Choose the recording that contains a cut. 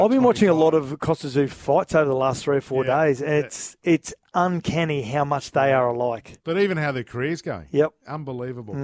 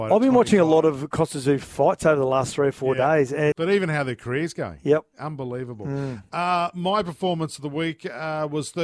second; 1 cut; at 3.5 s

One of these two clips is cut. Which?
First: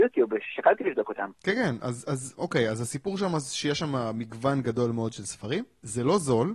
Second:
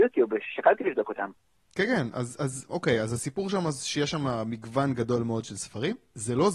first; 1 cut; at 1.3 s

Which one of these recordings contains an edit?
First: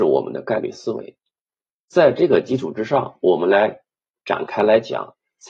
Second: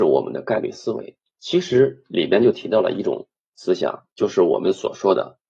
second; 1 cut; at 1.4 s

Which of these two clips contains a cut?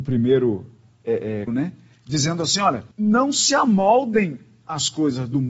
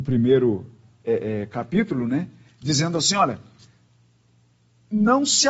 first; 2 cuts; at 1.5 s, 2.9 s

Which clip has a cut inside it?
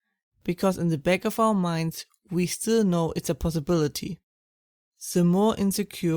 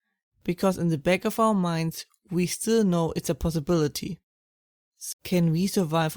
second; 1 cut; at 5.1 s

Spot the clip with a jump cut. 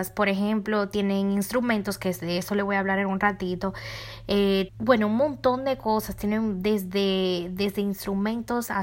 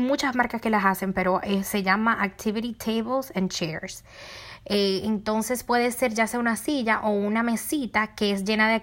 first; 1 cut; at 4.7 s

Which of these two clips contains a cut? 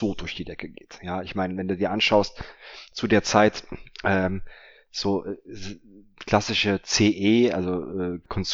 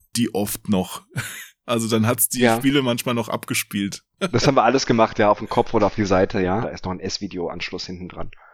second; 2 cuts; at 4.2 s, 6.6 s

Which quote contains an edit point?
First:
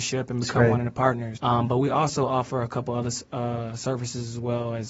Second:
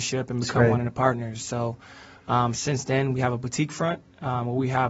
first; 1 cut; at 1.4 s

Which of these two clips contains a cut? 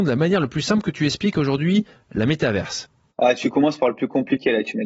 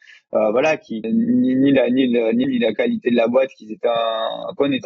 second; 2 cuts; at 1.0 s, 2.4 s

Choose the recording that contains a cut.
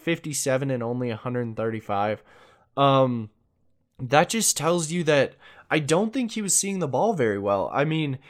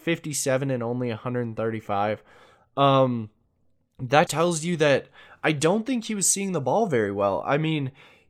second; 1 cut; at 4.3 s

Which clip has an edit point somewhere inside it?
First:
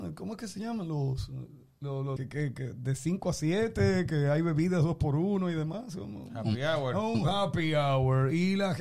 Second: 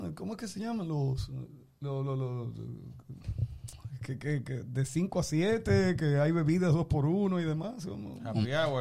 first; 1 cut; at 2.2 s

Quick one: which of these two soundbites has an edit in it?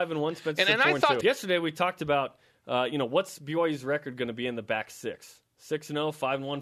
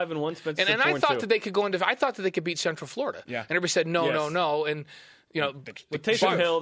first; 1 cut; at 1.2 s

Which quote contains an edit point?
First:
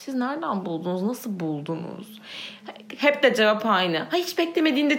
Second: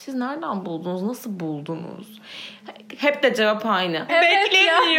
second; 1 cut; at 4.1 s

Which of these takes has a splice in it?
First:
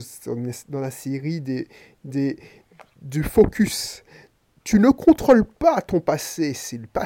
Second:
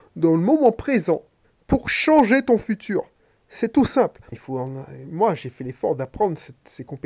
second; 1 cut; at 4.3 s

